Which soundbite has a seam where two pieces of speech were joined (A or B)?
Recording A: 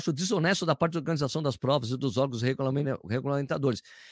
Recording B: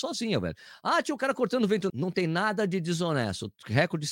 B